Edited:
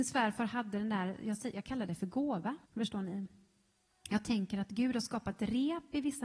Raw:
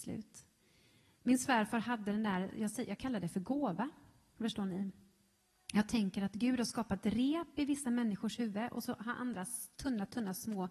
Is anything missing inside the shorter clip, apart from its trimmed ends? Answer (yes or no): yes